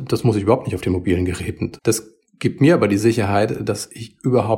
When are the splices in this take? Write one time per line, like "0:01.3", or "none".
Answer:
0:01.8

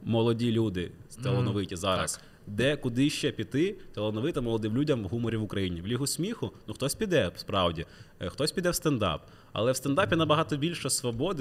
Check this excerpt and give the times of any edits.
none

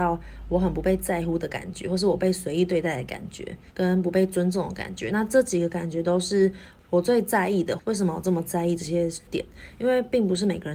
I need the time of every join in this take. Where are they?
0:03.7
0:07.8

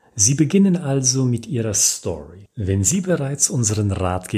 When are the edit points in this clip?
0:02.5

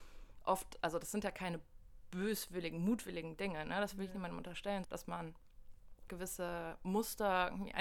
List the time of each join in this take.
0:04.8
0:06.1

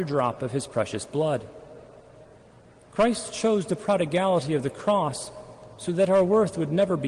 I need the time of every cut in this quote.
none

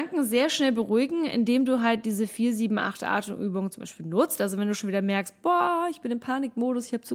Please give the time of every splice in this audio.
none

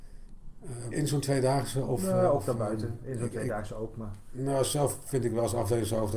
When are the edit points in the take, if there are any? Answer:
0:00.9

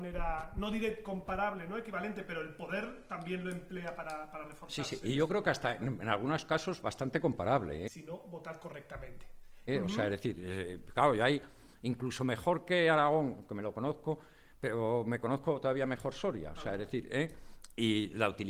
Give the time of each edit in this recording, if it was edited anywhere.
0:07.9
0:09.7

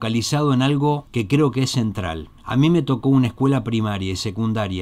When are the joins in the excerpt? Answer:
0:01.1
0:02.4

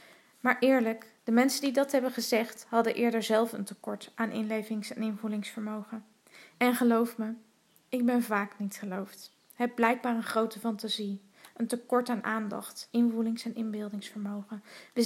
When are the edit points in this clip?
0:06.5
0:12.9

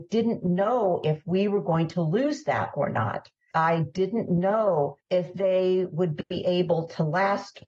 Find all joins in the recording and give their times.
0:03.5
0:05.0

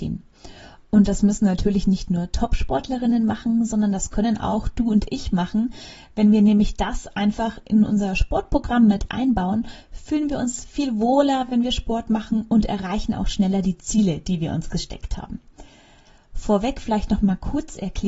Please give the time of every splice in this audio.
none

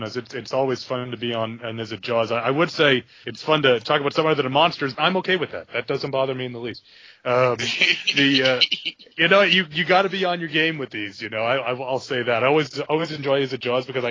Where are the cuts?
0:03.2
0:04.9

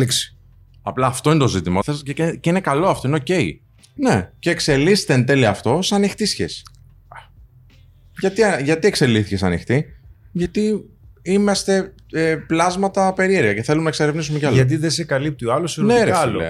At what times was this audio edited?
0:01.8
0:04.0

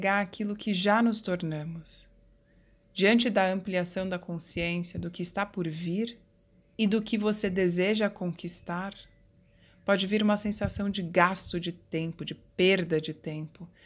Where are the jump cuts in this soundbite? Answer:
none

